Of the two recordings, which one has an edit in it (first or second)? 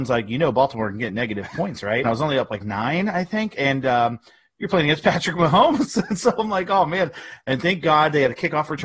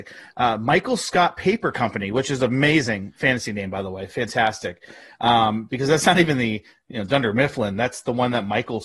first